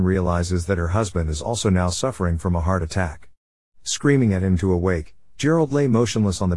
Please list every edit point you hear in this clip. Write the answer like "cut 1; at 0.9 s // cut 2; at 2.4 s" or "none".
none